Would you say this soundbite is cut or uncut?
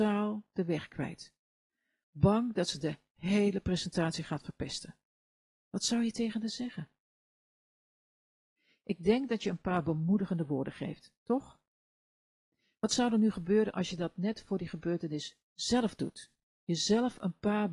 uncut